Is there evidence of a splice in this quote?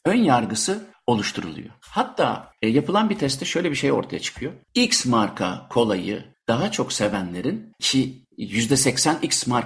no; 0 cuts

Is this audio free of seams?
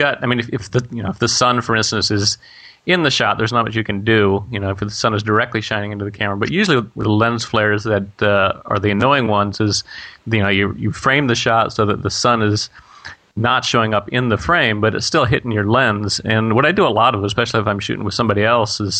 yes; 0 cuts

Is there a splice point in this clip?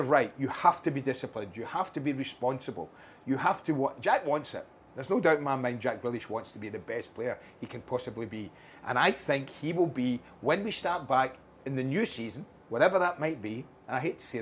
no; 0 cuts

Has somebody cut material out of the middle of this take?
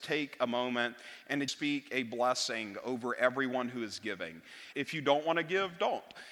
yes; 2 cuts; at 1.5 s, 4.7 s

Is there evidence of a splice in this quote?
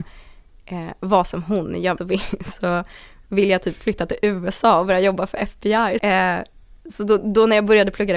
yes; 2 cuts; at 2.0 s, 6.0 s

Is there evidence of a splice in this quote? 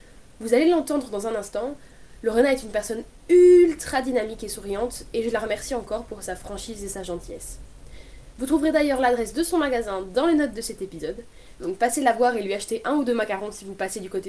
no; 0 cuts

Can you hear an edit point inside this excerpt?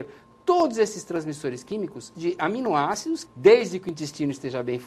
yes; 2 cuts; at 2.1 s, 3.3 s

